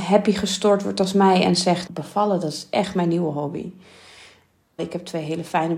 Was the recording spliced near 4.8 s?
yes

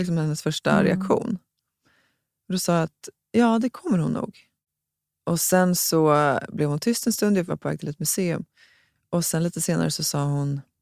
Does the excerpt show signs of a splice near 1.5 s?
no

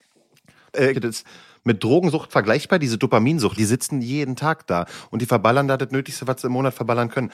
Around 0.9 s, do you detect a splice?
yes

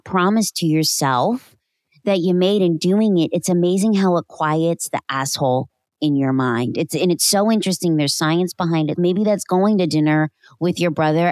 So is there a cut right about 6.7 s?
no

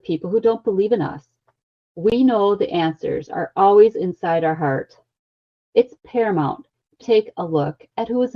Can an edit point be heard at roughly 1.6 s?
no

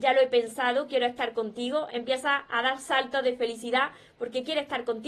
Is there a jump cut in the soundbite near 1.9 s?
yes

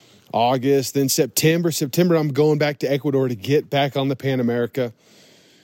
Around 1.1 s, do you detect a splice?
no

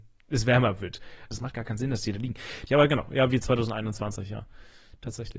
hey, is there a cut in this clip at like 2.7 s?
yes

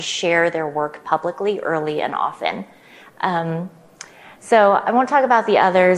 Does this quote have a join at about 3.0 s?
no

